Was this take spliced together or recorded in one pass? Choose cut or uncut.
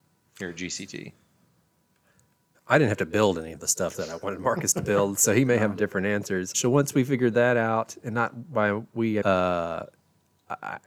cut